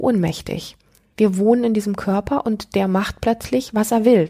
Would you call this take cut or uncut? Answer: cut